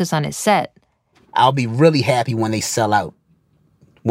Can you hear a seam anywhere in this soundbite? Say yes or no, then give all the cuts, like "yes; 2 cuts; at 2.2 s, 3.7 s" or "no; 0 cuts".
yes; 1 cut; at 1.1 s